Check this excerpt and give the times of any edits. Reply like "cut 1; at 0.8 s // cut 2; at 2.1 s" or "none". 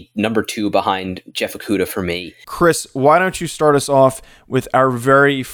cut 1; at 2.4 s